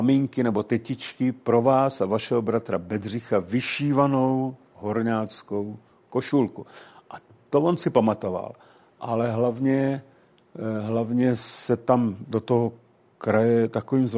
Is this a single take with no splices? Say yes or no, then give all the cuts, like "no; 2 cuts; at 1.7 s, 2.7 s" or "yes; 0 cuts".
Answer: yes; 0 cuts